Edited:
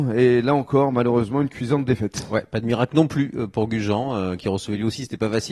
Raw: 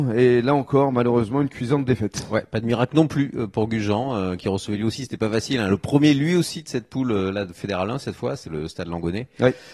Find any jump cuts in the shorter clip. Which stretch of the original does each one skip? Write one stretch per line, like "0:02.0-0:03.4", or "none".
none

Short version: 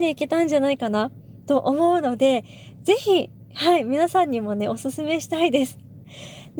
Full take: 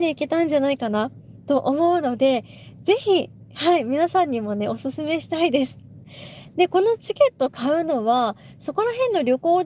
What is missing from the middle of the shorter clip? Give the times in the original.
none

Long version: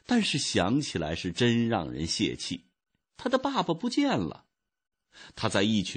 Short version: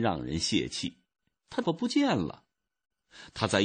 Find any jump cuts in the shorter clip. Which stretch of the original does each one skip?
0:03.3-0:03.6

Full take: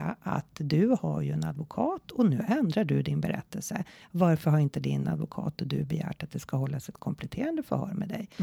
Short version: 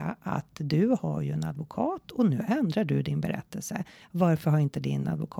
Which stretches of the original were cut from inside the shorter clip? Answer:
none

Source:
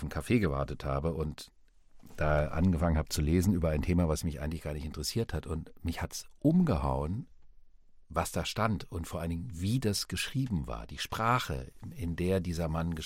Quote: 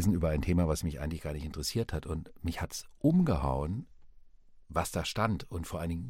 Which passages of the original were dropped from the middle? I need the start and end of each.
none

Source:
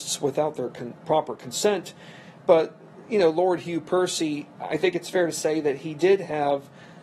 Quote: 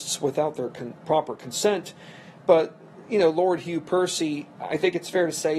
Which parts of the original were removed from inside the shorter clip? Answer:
none

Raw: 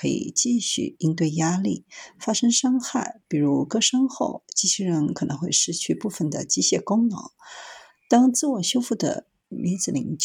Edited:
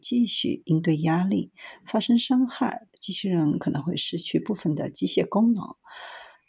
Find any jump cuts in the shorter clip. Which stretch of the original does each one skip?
0:03.2-0:04.5

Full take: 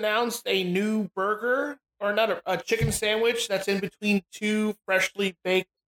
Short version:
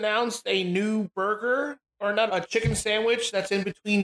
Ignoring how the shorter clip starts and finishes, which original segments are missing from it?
0:02.3-0:02.4

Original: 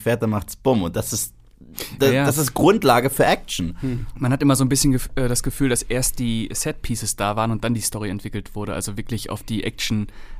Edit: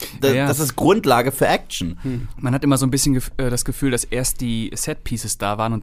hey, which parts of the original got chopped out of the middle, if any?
none

